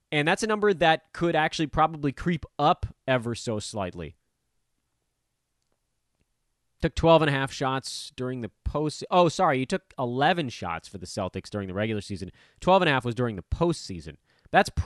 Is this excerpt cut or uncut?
uncut